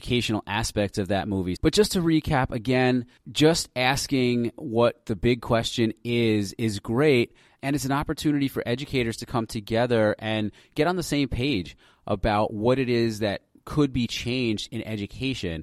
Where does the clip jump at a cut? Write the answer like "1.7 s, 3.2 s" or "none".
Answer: 1.6 s

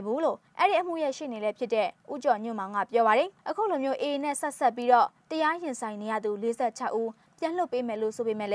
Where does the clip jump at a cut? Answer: 3.4 s

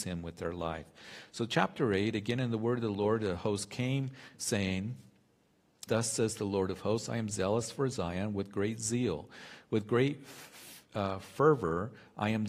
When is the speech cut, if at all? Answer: 5.9 s

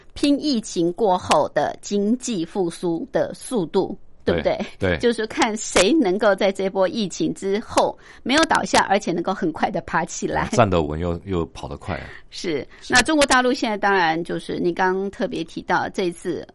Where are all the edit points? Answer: none

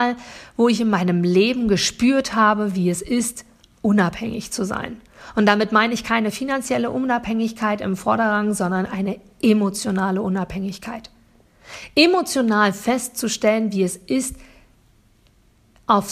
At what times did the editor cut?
none

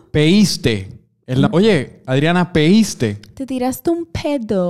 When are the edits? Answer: 1.5 s

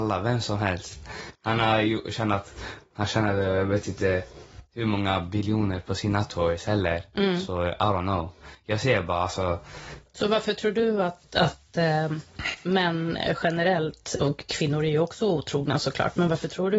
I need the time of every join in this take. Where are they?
none

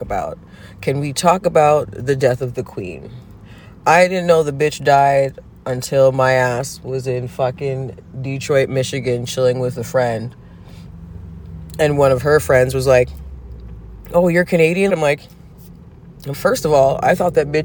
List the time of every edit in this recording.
14.9 s, 16.3 s

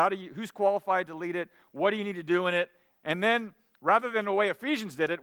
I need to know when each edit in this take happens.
none

